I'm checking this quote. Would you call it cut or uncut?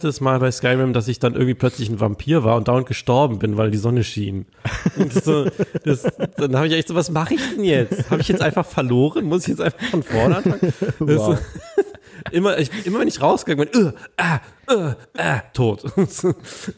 cut